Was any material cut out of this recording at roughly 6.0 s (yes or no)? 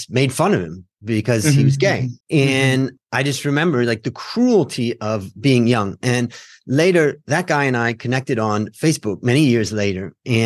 no